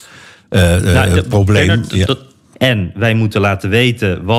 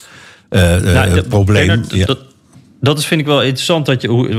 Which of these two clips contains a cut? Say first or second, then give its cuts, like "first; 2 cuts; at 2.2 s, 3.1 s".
first; 1 cut; at 2.5 s